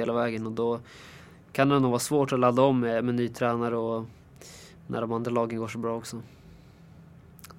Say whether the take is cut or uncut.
uncut